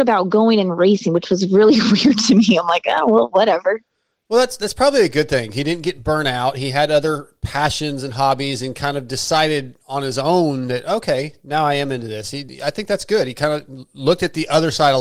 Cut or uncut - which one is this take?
uncut